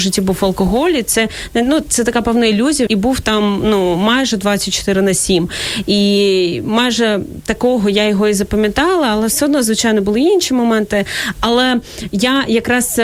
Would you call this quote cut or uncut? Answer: cut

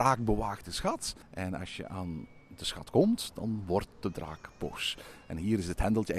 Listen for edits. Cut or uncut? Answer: cut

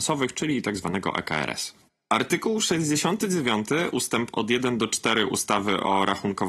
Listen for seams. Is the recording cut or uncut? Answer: uncut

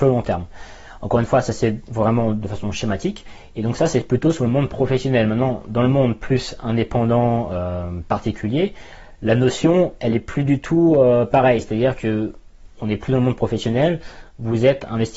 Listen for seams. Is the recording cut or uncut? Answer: uncut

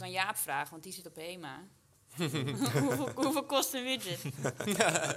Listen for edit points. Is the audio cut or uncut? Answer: uncut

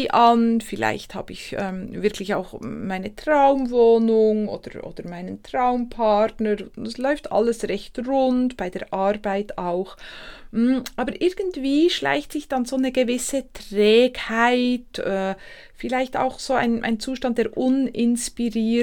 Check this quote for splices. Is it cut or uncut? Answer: uncut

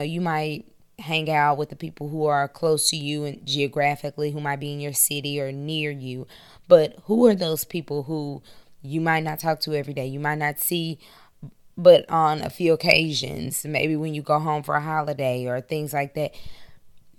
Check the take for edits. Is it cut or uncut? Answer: uncut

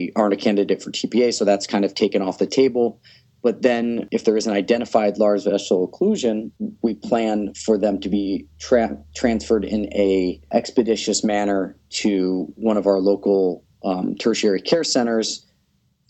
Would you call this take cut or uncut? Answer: cut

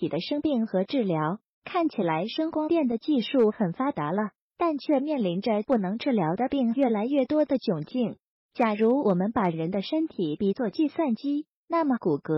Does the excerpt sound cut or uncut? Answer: uncut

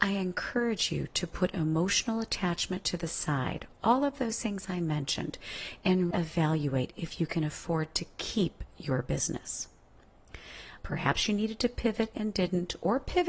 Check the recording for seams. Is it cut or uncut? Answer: cut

